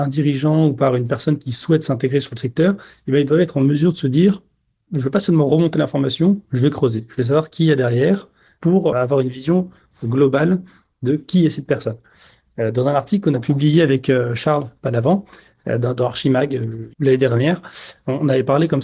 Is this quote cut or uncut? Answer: cut